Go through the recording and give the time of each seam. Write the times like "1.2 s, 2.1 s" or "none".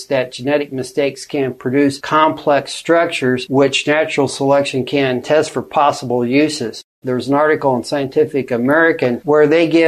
5.2 s, 7.0 s